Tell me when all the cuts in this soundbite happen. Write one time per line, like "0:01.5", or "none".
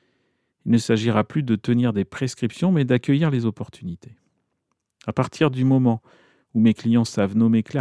none